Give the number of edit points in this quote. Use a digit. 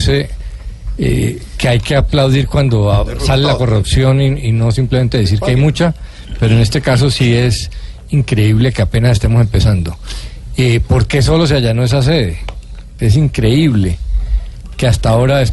1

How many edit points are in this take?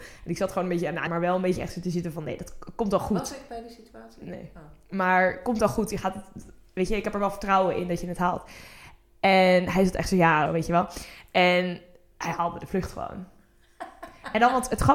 2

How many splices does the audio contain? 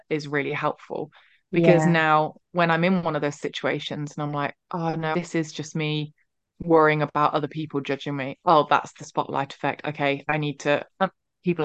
1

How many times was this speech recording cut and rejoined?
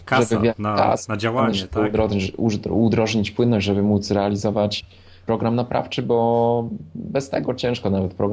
0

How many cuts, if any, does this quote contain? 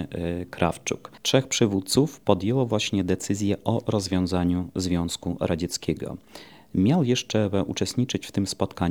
0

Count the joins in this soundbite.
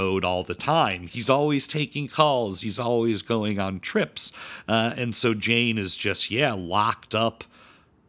1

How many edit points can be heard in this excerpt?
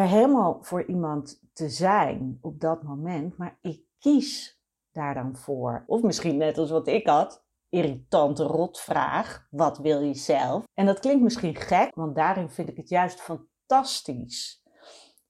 3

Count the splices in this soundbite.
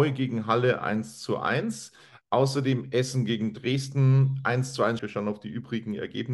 1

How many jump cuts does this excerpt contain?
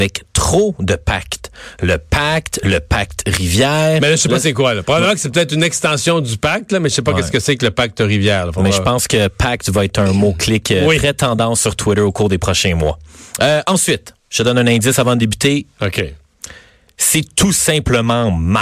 2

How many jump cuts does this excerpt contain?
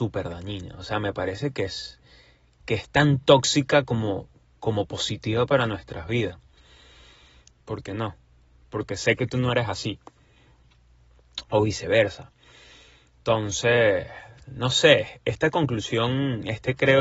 1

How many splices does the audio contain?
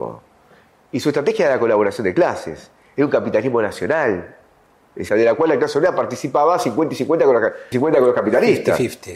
2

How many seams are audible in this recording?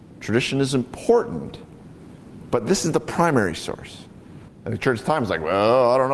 1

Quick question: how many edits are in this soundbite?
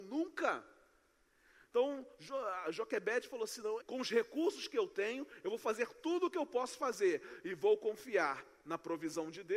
1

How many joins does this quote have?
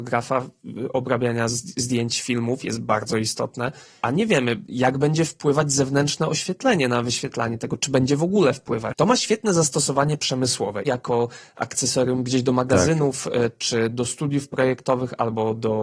2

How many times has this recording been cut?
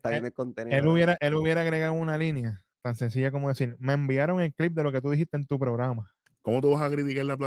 3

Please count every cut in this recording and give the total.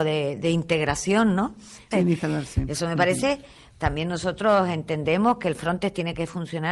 2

